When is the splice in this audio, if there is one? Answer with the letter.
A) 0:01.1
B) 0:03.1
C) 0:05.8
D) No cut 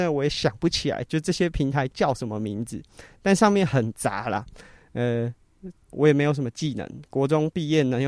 C